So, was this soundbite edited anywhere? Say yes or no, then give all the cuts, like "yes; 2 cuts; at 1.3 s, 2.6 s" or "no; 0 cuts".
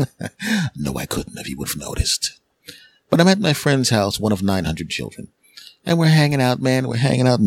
no; 0 cuts